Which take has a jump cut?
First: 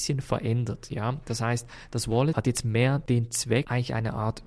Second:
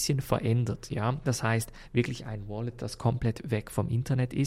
second; 1 cut; at 1.2 s

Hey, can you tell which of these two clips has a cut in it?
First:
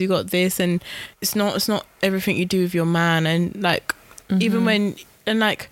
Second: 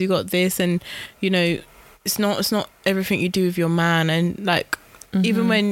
first; 1 cut; at 1.1 s

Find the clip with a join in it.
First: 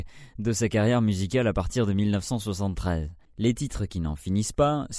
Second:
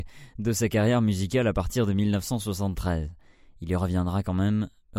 first; 1 cut; at 3.2 s

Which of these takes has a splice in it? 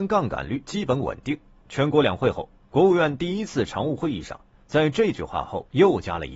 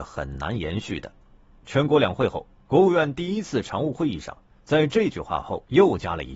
second; 1 cut; at 1.5 s

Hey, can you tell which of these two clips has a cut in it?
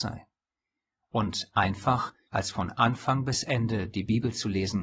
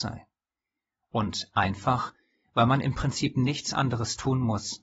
first; 1 cut; at 2.3 s

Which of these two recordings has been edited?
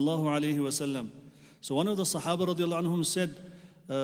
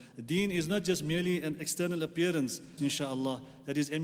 second; 1 cut; at 2.8 s

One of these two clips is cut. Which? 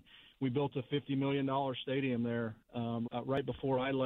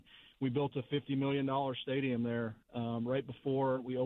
first; 1 cut; at 3.1 s

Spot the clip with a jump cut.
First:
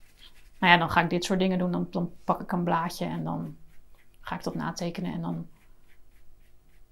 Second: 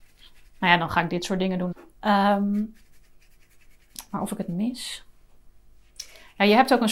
second; 1 cut; at 1.7 s

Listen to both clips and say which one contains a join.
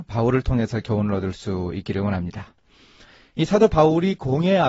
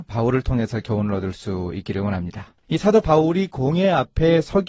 second; 1 cut; at 2.6 s

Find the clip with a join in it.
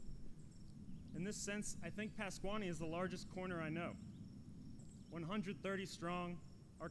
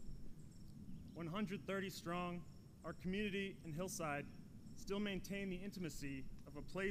second; 1 cut; at 1.1 s

